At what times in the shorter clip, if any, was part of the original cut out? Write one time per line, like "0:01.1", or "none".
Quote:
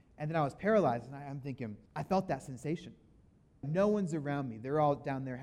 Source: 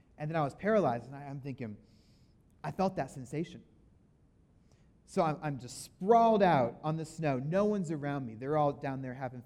0:01.9
0:03.6

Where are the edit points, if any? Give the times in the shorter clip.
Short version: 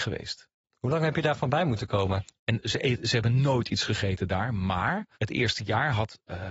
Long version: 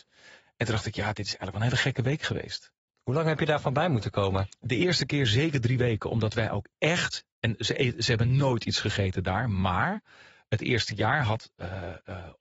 0:02.4
0:05.1

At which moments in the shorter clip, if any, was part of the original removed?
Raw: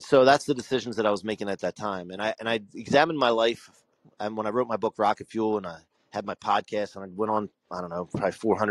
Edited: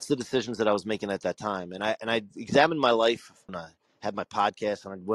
0:03.5

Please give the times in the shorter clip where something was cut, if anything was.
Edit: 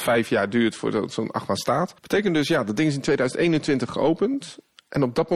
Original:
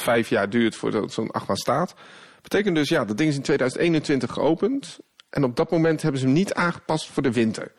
0:02.0

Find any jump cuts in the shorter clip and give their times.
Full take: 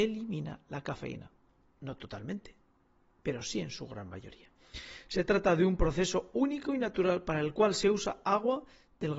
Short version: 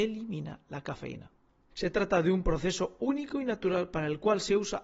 0:01.7

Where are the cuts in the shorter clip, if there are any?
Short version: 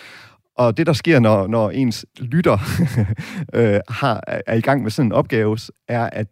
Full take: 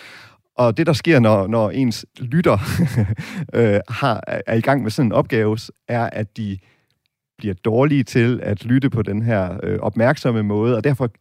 none

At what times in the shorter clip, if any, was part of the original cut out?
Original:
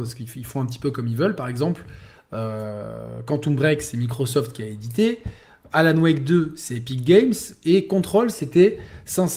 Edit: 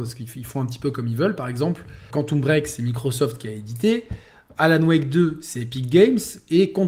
0:02.1

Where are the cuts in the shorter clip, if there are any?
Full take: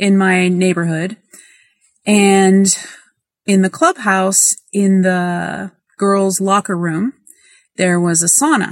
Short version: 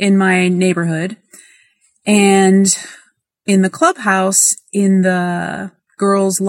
none

